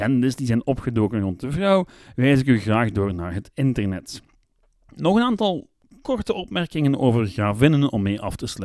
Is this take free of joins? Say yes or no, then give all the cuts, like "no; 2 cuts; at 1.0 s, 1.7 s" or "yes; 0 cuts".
yes; 0 cuts